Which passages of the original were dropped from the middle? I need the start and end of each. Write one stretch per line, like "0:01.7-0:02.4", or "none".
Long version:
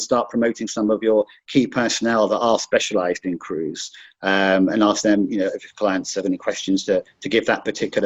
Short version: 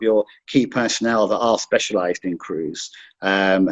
none